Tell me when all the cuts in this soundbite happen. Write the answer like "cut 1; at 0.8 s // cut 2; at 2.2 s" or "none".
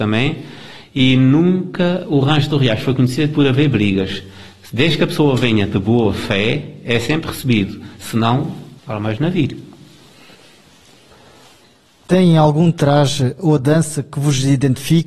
cut 1; at 8.8 s

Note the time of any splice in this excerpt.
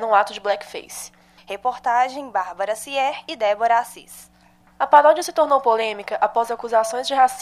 cut 1; at 1.4 s // cut 2; at 4.7 s

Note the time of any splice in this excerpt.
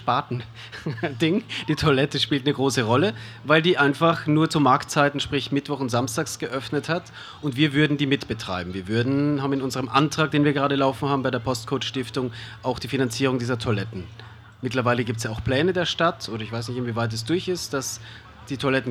none

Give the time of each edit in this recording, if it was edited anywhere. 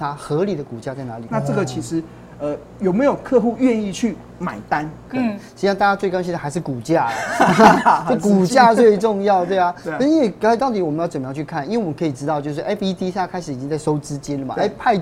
cut 1; at 1.3 s // cut 2; at 5.1 s // cut 3; at 10.6 s

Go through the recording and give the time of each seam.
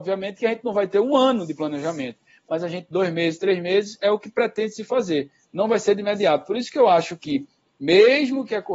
none

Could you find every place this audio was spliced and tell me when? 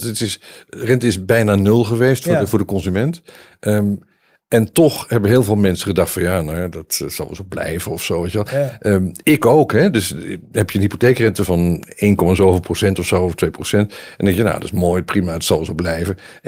cut 1; at 9.2 s // cut 2; at 11.4 s

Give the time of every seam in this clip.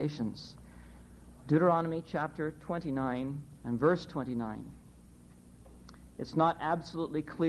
cut 1; at 3.6 s

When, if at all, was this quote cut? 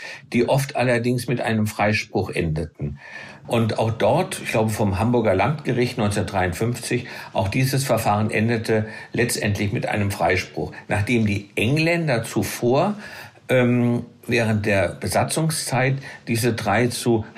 cut 1; at 3.4 s

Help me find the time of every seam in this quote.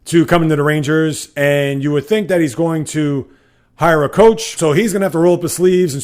cut 1; at 4.6 s

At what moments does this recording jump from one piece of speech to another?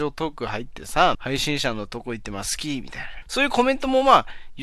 cut 1; at 1.1 s // cut 2; at 3.2 s

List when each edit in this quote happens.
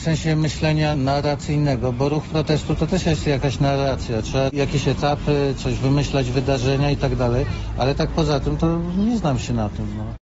none

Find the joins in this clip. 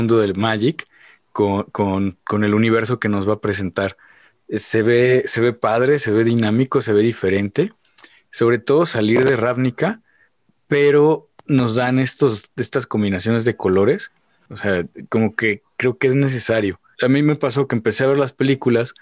cut 1; at 14.5 s // cut 2; at 16.9 s

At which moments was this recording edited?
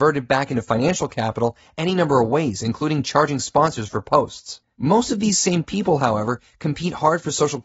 cut 1; at 4.6 s

